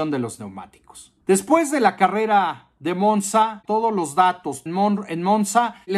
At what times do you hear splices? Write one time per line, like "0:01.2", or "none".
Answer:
0:01.2
0:03.6
0:04.7